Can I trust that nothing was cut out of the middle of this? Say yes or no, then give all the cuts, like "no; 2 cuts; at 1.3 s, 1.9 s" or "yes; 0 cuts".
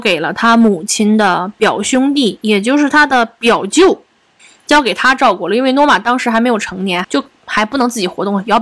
no; 1 cut; at 7.0 s